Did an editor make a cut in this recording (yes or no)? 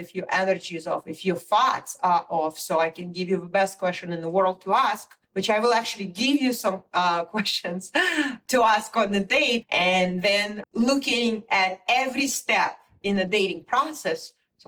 yes